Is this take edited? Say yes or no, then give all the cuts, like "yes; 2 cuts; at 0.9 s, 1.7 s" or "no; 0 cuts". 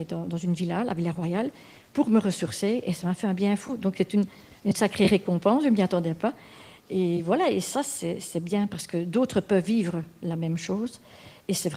no; 0 cuts